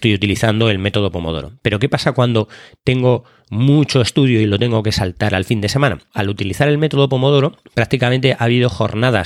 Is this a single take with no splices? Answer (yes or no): no